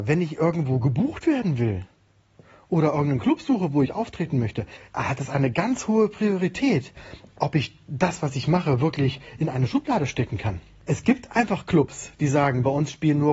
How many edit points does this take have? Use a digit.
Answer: 1